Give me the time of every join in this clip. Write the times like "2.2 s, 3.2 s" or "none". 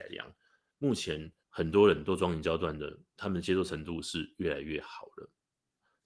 1.4 s, 3.1 s